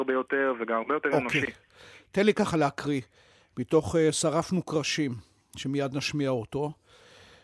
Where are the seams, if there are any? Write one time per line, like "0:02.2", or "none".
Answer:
none